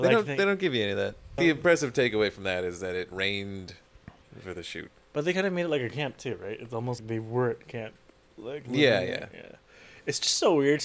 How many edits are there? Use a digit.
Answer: 3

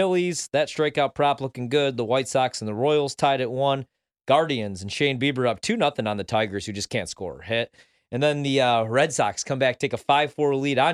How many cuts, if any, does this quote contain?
0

